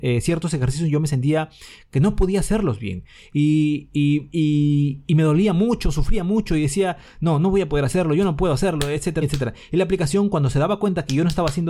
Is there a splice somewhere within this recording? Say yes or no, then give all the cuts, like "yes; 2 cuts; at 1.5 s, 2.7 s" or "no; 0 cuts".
yes; 1 cut; at 9.2 s